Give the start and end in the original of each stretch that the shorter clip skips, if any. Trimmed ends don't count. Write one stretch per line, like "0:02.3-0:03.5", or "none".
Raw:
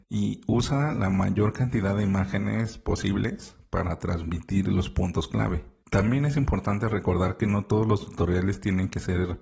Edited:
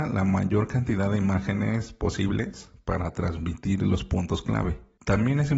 none